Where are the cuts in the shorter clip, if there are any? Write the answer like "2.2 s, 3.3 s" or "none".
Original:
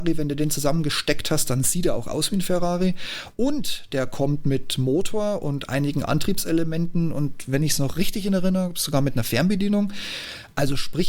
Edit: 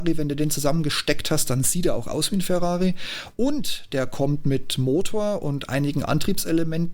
none